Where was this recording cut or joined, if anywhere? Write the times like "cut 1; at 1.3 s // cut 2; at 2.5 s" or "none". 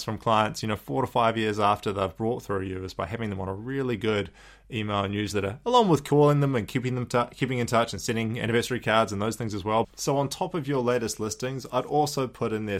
cut 1; at 9.8 s